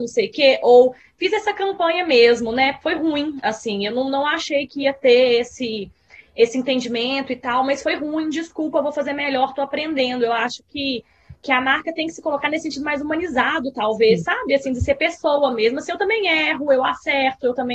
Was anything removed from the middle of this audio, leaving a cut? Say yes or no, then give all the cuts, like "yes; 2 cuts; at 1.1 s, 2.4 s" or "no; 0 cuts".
no; 0 cuts